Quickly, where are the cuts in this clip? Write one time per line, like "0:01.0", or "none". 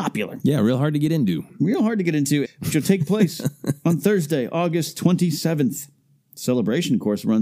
0:02.4